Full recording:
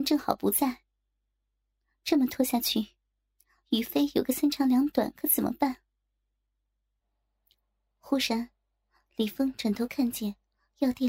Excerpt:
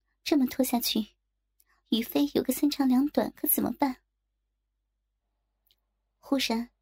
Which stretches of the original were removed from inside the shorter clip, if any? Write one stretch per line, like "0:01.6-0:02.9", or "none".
none

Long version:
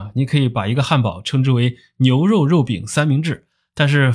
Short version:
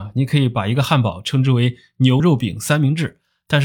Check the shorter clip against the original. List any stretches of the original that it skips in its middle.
0:02.2-0:02.5

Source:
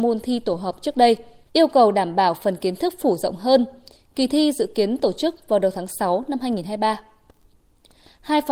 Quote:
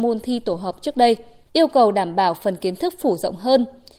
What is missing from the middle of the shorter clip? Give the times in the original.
none

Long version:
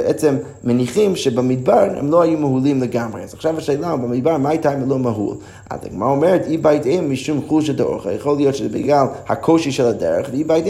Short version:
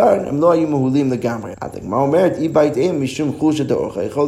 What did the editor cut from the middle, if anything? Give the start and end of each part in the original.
0:03.2-0:05.6

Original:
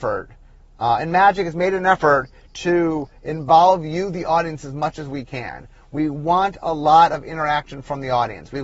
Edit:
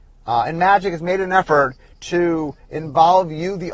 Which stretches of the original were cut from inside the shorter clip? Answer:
none

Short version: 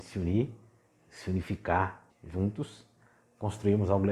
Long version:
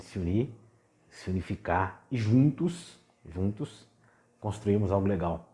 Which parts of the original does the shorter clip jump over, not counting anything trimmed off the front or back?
0:02.1-0:03.1

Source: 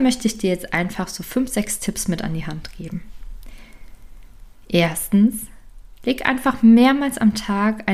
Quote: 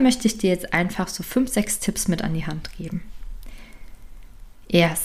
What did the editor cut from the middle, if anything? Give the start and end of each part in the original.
none

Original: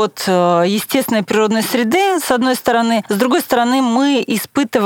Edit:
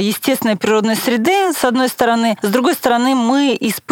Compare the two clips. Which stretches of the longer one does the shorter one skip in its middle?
none

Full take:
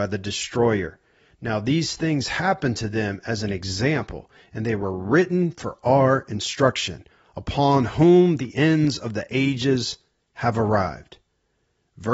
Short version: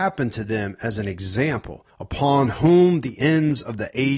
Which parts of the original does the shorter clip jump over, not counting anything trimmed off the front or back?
0:04.3-0:07.3

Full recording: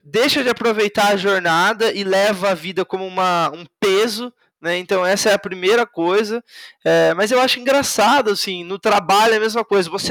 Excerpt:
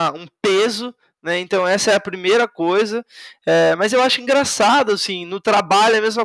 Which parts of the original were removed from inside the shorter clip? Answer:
none

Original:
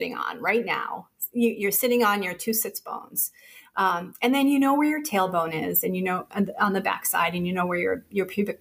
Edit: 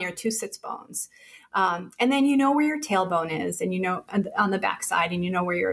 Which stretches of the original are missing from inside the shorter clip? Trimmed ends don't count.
none

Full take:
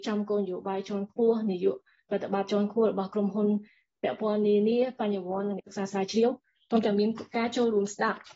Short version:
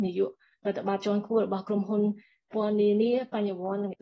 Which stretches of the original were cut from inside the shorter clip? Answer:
0:04.0-0:04.2

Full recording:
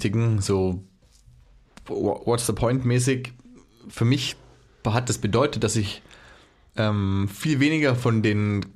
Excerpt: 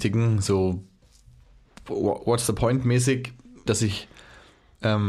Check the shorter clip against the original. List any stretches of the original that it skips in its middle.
0:03.7-0:05.6

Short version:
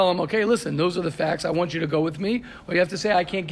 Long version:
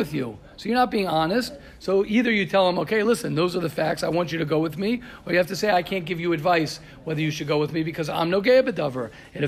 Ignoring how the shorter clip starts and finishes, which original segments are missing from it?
none

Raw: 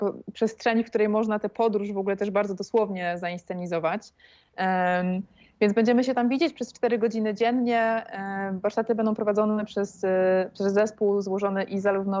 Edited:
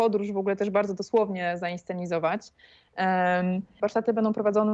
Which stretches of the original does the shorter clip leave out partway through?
0:05.4-0:08.6

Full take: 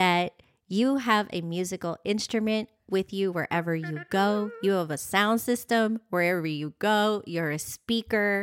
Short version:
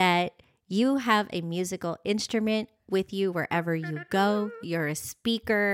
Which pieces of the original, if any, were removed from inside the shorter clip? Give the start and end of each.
0:04.6-0:07.2

